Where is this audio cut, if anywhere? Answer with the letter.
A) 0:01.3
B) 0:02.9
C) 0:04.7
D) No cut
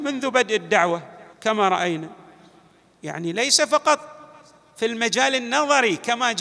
A